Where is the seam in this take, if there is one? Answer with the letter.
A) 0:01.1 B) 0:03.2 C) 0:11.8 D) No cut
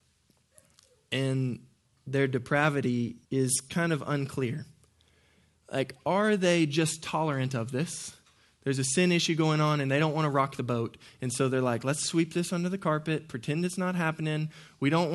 B